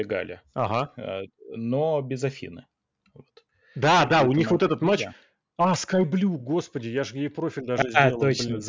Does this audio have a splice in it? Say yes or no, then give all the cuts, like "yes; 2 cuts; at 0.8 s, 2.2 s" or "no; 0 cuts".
no; 0 cuts